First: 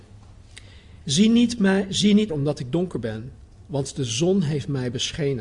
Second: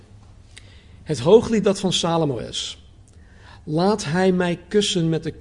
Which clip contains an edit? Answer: first; 2 cuts; at 1.0 s, 2.3 s

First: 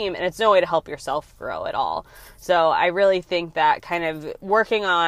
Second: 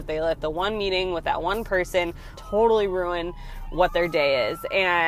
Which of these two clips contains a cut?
second; 1 cut; at 2.4 s

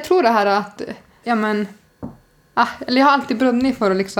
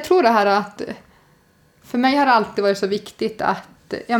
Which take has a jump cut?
first; 1 cut; at 1.2 s

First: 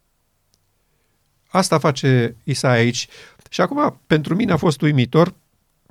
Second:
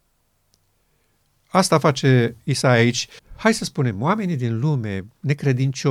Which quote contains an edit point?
second; 1 cut; at 3.2 s

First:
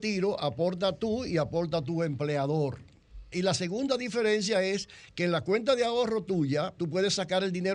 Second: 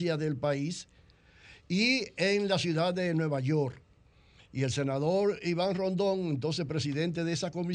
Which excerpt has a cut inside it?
first; 2 cuts; at 3.3 s, 6.8 s

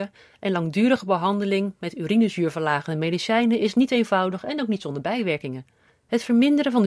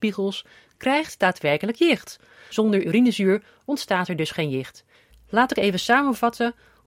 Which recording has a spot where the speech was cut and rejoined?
second; 2 cuts; at 2.5 s, 5.1 s

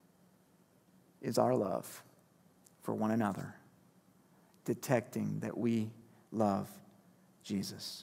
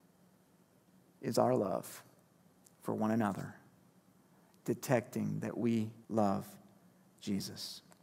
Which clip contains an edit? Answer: second; 1 cut; at 6.0 s

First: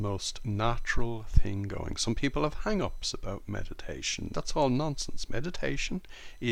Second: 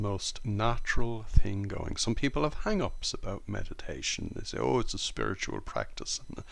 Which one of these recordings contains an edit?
first; 1 cut; at 4.3 s

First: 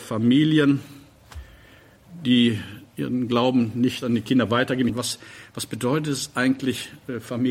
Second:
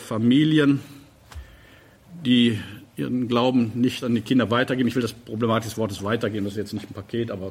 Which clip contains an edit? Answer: first; 1 cut; at 4.9 s

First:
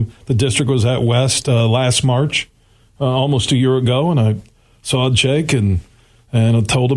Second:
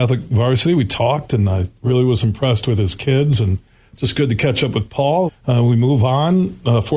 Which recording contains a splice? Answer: second; 1 cut; at 5.3 s

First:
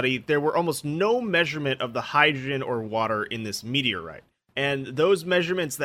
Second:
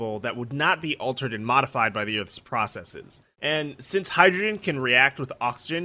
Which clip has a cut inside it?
second; 1 cut; at 3.3 s

